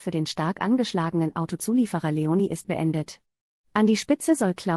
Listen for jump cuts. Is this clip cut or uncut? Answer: uncut